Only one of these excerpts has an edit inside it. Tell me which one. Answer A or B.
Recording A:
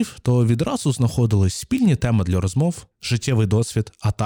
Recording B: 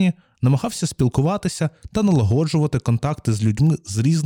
A